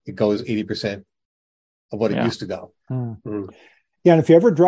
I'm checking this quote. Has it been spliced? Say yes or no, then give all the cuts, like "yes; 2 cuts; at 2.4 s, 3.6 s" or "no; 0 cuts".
yes; 1 cut; at 2.9 s